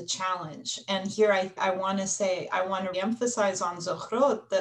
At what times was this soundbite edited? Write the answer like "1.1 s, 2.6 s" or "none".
1.6 s, 2.9 s